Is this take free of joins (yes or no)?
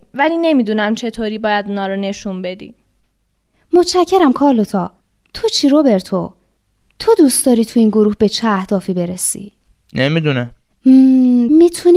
yes